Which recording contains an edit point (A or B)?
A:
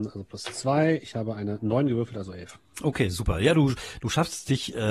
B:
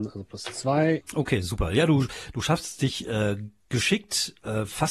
B